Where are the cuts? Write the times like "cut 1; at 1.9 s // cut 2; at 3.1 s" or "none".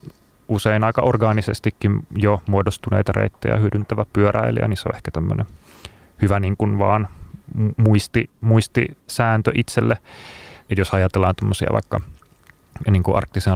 cut 1; at 10.6 s